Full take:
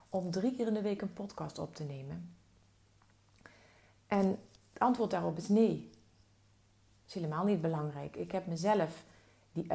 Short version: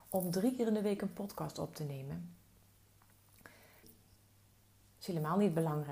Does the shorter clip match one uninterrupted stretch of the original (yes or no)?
no